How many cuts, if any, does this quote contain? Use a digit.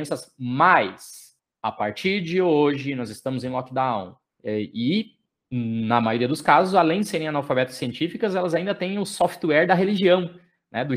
1